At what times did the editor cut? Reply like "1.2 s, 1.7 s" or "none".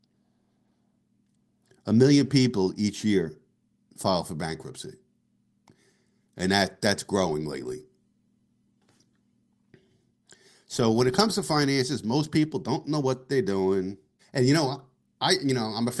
14.2 s